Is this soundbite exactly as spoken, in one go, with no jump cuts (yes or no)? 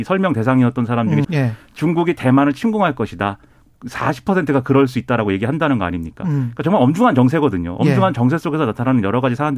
no